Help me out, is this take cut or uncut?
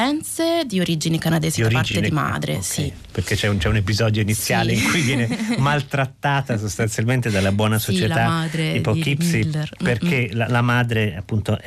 uncut